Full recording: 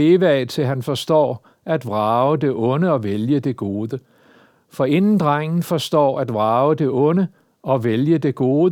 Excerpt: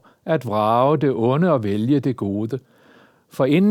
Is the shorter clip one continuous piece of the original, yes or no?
yes